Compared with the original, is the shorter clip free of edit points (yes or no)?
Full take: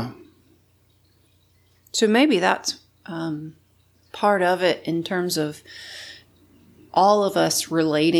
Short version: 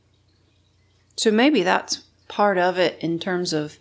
no